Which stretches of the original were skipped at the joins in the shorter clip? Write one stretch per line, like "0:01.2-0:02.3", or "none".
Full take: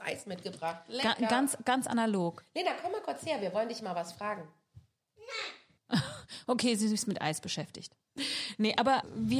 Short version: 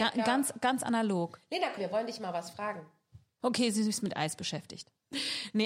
0:02.8-0:03.4
0:05.0-0:06.4